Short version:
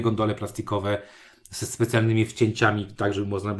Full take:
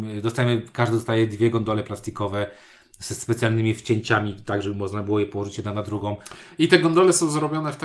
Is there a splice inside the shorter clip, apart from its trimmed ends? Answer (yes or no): no